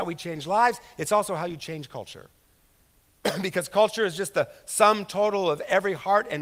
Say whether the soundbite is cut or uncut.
uncut